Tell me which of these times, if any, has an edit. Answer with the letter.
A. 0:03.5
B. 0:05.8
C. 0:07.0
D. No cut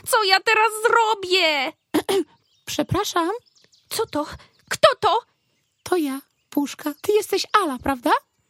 C